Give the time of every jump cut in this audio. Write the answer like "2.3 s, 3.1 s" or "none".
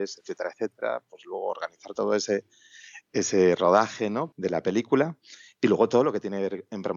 4.3 s